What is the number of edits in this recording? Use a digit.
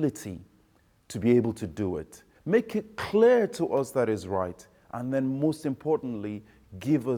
1